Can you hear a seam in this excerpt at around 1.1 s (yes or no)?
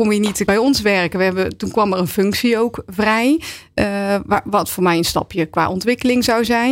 no